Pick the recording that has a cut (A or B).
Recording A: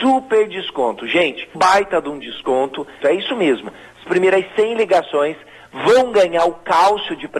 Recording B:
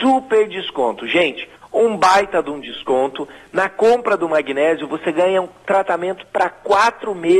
A